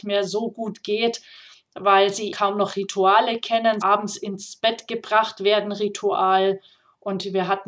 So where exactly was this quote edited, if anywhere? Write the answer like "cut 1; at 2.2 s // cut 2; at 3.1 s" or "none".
cut 1; at 2.3 s // cut 2; at 3.8 s